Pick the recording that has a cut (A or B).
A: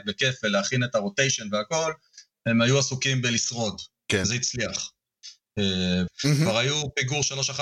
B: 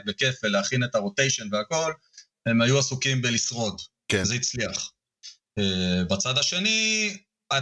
A